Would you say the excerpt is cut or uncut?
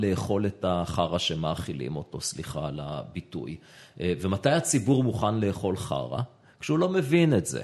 uncut